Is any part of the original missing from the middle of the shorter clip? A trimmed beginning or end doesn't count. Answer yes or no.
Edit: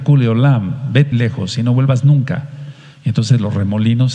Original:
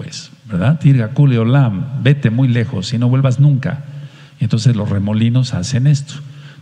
yes